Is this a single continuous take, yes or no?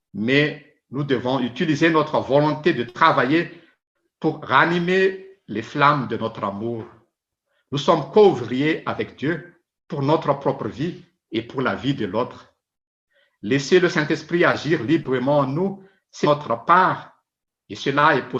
no